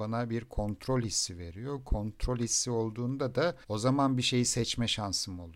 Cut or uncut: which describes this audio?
cut